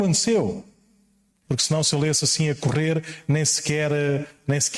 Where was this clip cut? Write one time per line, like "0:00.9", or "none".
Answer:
0:01.5